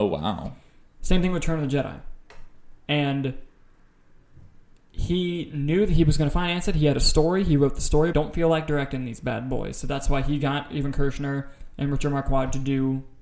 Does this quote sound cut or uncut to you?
cut